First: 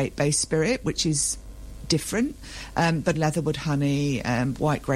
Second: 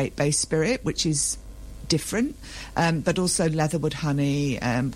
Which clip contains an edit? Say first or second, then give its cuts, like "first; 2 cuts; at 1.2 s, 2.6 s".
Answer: first; 1 cut; at 3.1 s